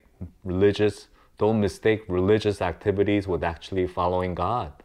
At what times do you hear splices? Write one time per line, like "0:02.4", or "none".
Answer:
none